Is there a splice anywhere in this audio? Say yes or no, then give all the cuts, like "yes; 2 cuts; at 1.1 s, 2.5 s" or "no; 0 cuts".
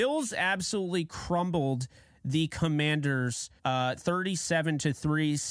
yes; 1 cut; at 3.6 s